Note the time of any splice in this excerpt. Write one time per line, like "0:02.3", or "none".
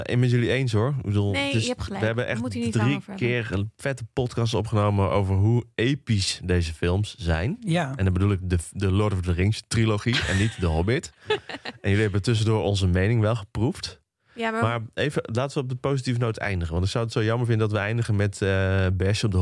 none